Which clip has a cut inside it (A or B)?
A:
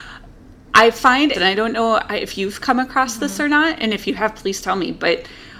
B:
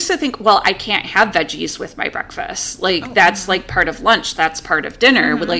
A